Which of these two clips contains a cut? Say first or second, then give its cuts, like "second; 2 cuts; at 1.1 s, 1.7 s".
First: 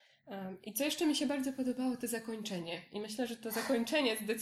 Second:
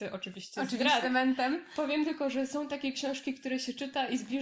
second; 1 cut; at 1.0 s